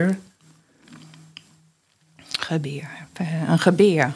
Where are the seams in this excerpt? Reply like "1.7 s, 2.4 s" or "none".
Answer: none